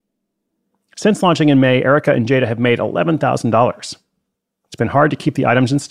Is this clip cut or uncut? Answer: uncut